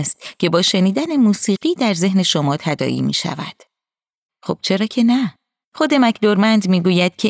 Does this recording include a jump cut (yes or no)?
yes